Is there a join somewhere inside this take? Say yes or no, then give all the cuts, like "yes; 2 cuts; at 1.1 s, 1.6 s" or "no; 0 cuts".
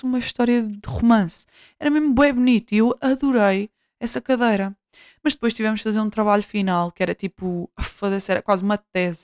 no; 0 cuts